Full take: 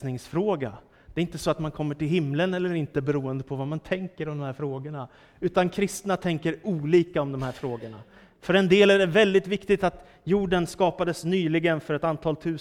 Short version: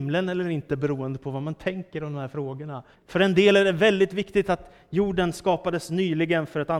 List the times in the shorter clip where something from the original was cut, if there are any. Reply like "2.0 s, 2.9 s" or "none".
2.9 s